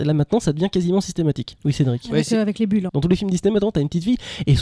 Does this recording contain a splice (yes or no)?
yes